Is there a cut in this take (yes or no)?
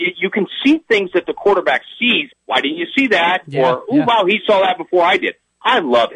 yes